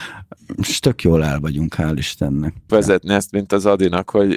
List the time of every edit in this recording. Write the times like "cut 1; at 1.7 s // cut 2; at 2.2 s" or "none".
cut 1; at 2.7 s